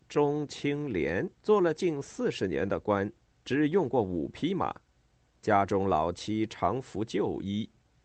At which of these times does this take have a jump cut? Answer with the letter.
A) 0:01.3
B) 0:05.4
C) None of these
A